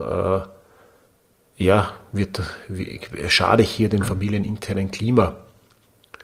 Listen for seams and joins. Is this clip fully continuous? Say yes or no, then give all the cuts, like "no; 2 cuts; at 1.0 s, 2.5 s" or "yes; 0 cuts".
yes; 0 cuts